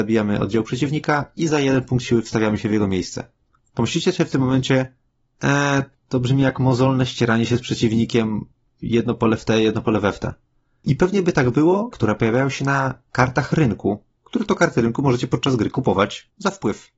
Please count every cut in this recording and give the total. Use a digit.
2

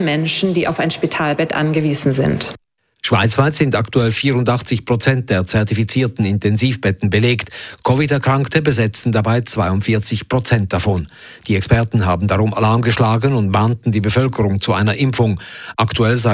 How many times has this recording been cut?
0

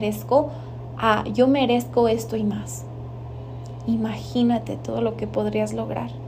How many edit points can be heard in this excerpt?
0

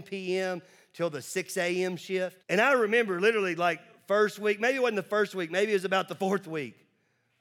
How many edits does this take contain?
1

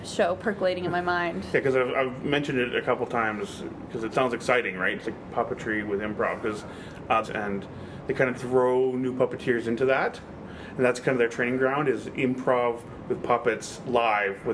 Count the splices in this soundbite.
2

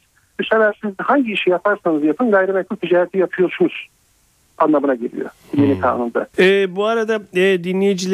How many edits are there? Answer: 1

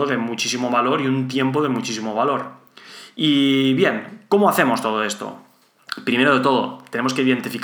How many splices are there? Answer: 0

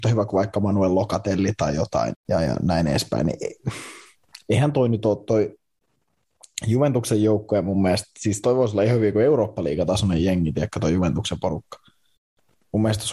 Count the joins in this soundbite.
1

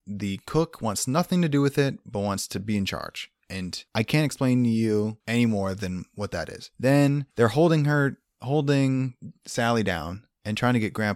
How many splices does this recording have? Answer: 1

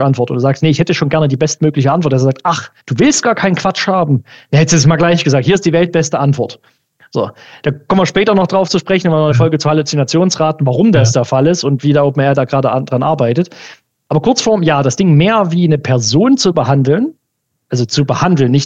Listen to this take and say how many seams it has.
1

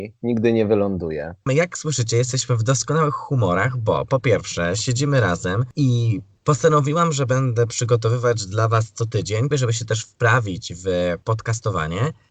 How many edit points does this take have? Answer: 2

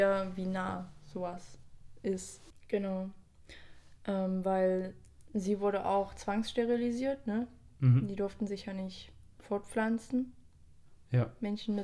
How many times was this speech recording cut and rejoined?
1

